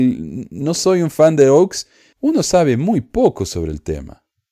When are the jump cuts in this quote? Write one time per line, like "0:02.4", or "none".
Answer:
0:02.1